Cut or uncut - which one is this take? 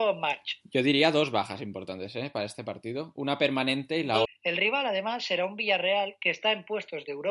cut